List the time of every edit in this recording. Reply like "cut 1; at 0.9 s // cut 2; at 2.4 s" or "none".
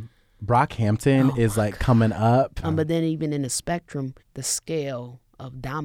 cut 1; at 2.6 s // cut 2; at 4.2 s